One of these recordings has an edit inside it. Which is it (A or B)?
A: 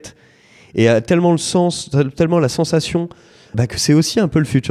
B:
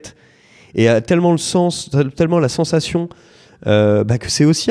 A